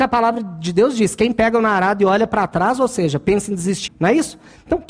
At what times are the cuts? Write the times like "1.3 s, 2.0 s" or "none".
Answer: 3.9 s